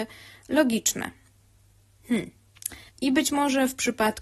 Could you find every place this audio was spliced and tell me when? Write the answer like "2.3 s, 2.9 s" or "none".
2.9 s